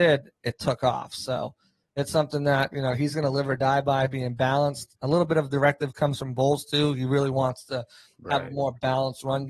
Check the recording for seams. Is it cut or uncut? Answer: uncut